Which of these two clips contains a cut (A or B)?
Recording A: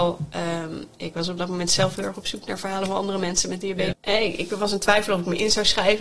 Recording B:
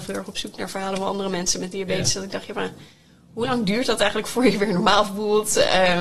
A